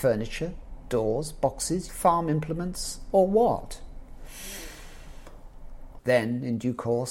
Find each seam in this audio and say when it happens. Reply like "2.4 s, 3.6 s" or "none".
1.9 s, 6.0 s